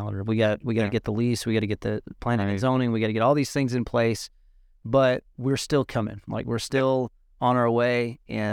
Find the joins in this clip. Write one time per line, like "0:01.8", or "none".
none